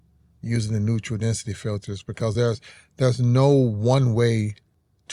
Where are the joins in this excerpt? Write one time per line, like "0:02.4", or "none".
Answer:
none